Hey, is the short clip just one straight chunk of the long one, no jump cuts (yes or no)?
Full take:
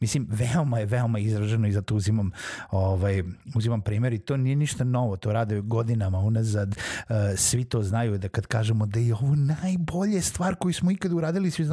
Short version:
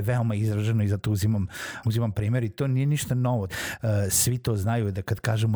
no